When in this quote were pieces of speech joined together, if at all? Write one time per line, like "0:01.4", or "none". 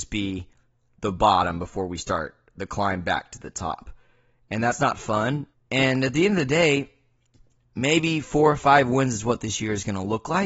0:05.5